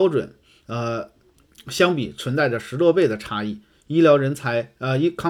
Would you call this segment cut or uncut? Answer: uncut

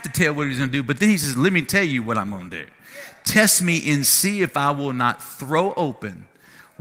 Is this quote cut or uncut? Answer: uncut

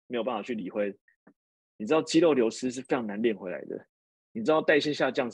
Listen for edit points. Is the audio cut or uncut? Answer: uncut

